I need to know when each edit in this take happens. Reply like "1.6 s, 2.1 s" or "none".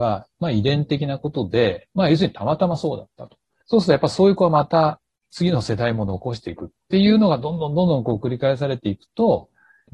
3.6 s